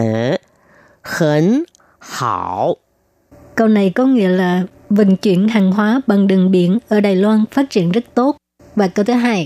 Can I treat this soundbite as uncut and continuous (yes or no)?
yes